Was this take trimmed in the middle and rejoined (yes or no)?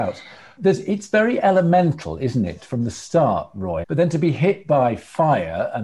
yes